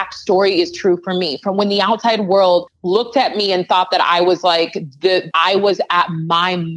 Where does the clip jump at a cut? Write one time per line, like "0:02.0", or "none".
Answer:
0:05.3